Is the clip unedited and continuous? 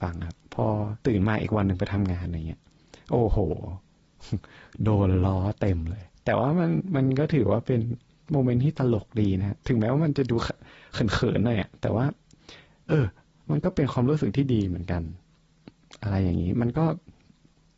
no; 1 cut; at 1.0 s

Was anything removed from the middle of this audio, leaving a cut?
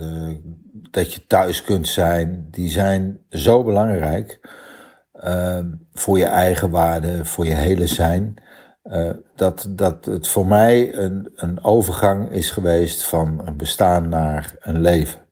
no; 0 cuts

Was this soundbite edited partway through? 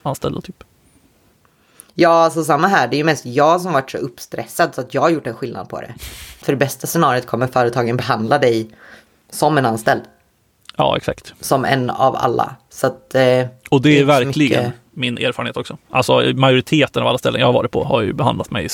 yes; 1 cut; at 6.4 s

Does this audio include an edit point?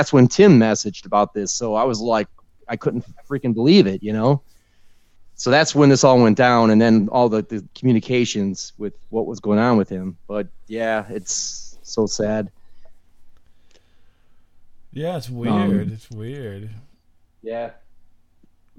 no; 0 cuts

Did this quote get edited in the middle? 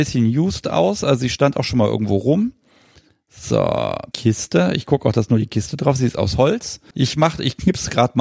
yes; 2 cuts; at 4.1 s, 6.9 s

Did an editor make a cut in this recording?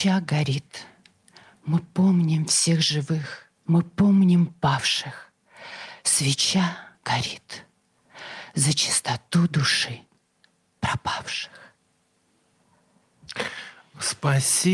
yes; 2 cuts; at 3.6 s, 6.9 s

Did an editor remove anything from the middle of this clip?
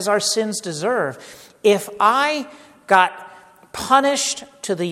no; 0 cuts

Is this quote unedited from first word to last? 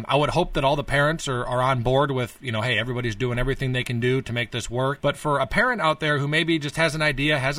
no; 1 cut; at 5.0 s

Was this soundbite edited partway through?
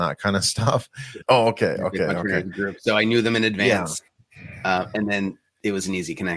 yes; 1 cut; at 1.2 s

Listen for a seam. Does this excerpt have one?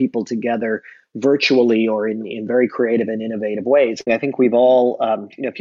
yes; 1 cut; at 4.1 s

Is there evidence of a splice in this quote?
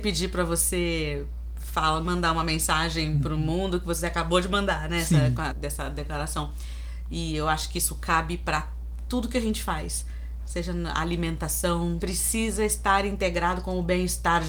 yes; 2 cuts; at 5.5 s, 12.0 s

